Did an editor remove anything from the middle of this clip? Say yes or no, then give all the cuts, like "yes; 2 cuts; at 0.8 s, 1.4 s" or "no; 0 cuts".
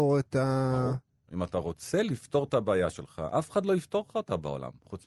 no; 0 cuts